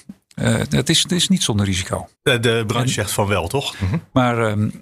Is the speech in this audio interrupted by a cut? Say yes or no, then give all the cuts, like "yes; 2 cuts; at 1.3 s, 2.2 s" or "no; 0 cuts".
yes; 2 cuts; at 2.1 s, 3.7 s